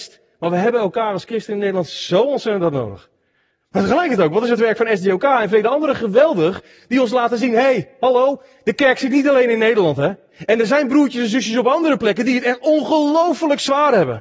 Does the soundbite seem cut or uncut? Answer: uncut